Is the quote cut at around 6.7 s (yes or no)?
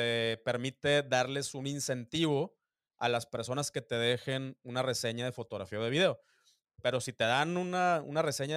yes